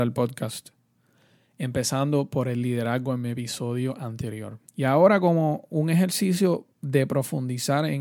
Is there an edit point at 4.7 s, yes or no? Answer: yes